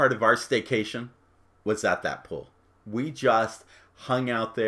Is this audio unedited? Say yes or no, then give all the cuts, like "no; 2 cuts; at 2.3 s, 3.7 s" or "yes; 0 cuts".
yes; 0 cuts